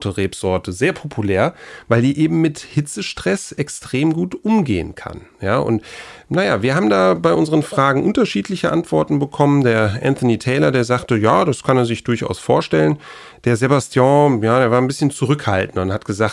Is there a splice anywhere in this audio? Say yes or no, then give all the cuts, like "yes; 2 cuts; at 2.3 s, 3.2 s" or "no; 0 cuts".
no; 0 cuts